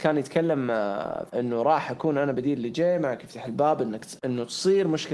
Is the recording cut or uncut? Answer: cut